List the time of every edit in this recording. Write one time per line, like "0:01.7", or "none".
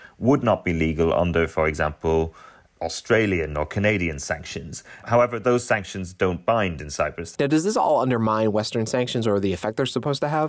0:07.3

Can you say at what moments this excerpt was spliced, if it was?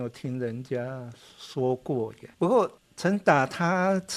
0:02.3

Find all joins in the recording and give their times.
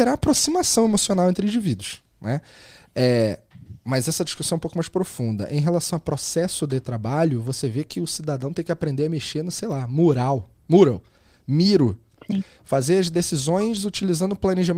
none

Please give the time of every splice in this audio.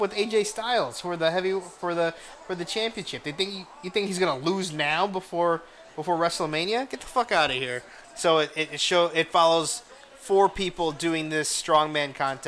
0:08.0

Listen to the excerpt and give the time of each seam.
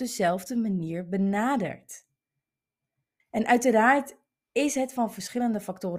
0:03.2

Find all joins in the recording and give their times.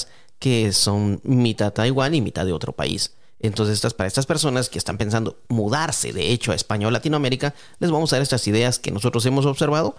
none

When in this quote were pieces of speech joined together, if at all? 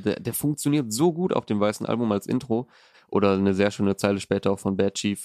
0:02.9

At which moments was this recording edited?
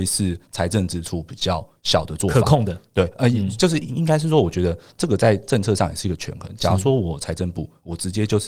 none

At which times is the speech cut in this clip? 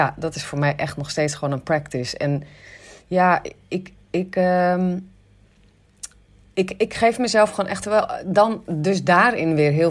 none

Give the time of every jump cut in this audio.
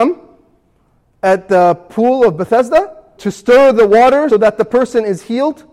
0:03.2
0:04.3

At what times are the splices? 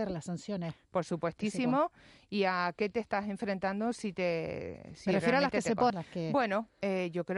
0:05.9

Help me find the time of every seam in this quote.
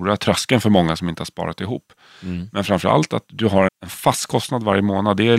0:03.7

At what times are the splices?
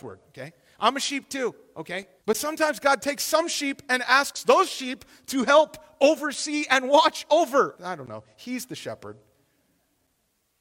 0:02.2
0:07.7

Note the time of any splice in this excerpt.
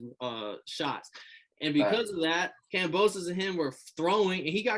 none

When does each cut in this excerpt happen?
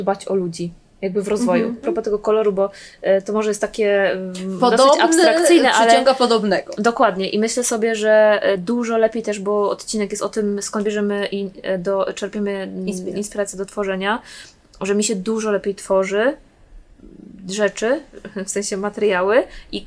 0:01.8

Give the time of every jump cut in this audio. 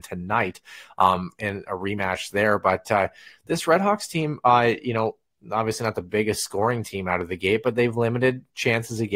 none

